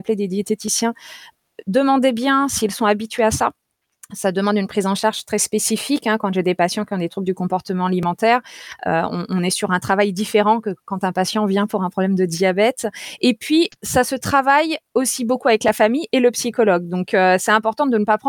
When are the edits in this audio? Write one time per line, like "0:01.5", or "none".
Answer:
none